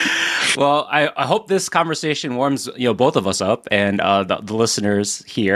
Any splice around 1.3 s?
no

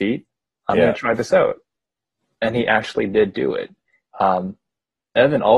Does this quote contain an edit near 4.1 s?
yes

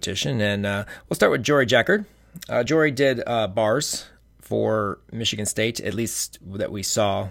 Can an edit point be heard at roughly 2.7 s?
no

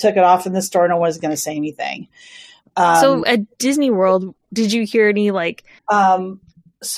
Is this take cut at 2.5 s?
no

